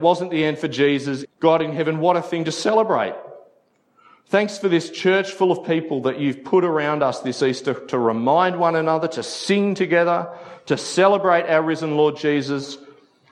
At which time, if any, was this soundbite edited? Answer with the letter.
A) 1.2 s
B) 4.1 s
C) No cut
A